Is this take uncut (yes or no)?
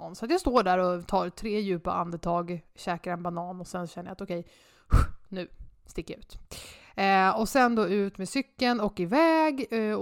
yes